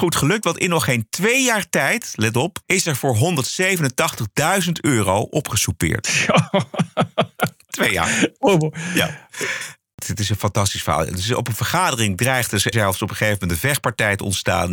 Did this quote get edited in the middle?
yes; 2 cuts; at 2.6 s, 12.7 s

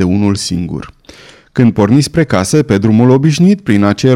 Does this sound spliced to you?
no; 0 cuts

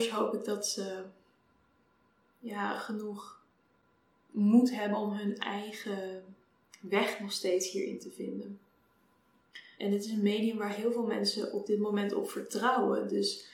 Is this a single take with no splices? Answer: no; 1 cut; at 9.7 s

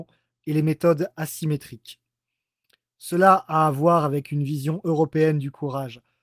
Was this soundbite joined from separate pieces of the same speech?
no; 0 cuts

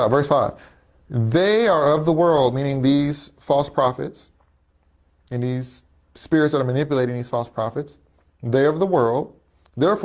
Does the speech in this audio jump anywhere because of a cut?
no; 0 cuts

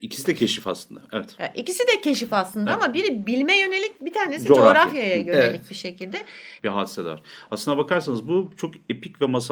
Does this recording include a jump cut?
yes; 2 cuts; at 4.0 s, 6.6 s

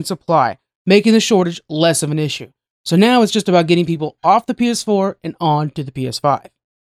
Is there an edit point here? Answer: no; 0 cuts

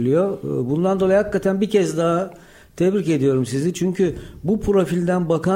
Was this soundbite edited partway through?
no; 0 cuts

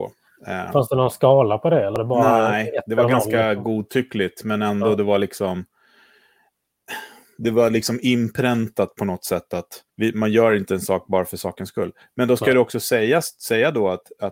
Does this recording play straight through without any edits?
no; 1 cut; at 9.9 s

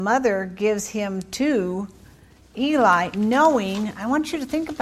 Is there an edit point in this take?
no; 0 cuts

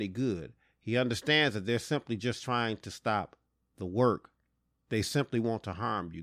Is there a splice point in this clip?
yes; 1 cut; at 4.8 s

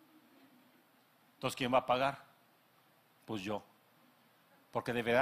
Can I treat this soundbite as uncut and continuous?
yes; 0 cuts

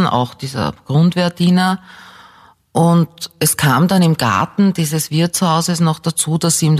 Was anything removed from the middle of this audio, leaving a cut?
no; 0 cuts

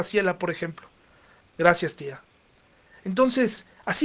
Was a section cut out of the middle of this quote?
yes; 1 cut; at 1.4 s

